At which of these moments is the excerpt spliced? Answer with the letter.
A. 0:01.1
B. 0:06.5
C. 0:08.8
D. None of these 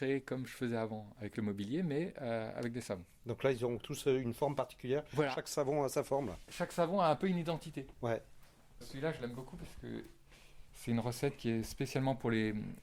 C